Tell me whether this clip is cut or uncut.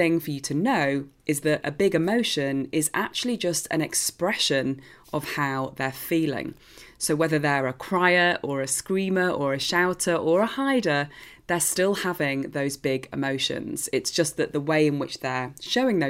uncut